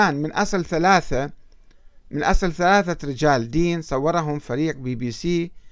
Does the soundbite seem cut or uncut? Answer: uncut